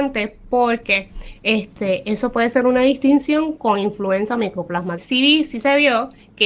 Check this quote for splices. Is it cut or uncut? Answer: cut